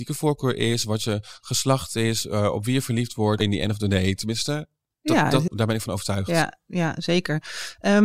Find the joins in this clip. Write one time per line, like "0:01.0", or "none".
0:03.4
0:05.5